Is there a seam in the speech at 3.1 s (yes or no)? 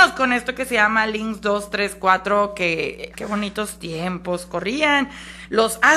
yes